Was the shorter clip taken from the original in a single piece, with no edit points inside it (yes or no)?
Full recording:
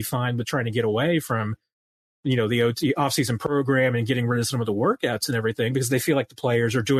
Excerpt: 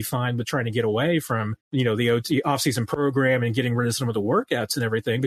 no